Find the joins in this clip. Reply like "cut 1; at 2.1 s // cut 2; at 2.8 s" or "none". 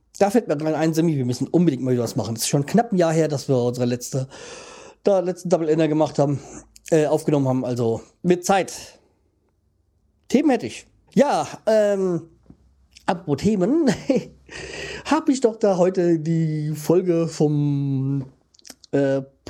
cut 1; at 11.1 s

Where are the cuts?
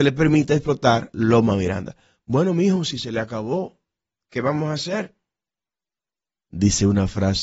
cut 1; at 6.5 s

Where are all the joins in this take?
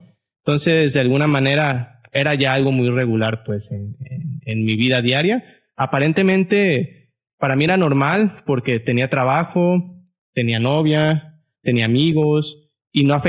none

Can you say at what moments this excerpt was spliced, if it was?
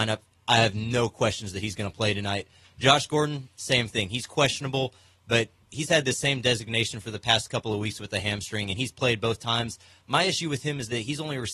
none

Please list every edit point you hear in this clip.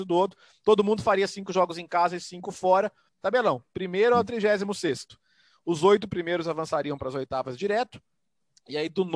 cut 1; at 3.1 s

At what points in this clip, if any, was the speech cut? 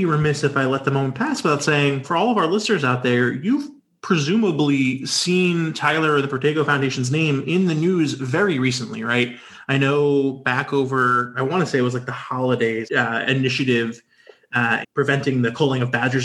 cut 1; at 2.0 s // cut 2; at 12.9 s // cut 3; at 14.8 s

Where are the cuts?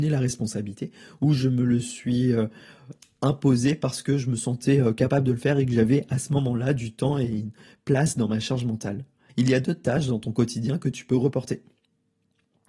cut 1; at 9.3 s

